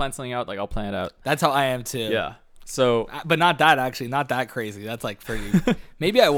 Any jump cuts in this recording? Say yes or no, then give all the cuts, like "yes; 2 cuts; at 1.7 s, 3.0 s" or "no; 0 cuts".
no; 0 cuts